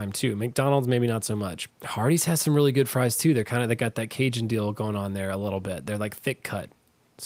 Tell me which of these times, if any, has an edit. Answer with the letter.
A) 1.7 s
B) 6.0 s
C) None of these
A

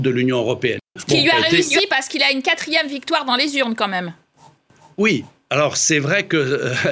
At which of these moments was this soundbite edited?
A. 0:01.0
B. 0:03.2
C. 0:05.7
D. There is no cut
A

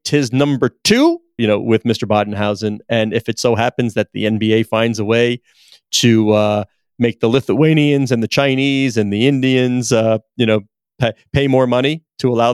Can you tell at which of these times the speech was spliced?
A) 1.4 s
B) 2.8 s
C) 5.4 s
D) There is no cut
A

